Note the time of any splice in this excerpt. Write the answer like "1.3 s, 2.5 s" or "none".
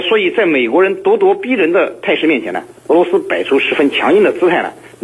none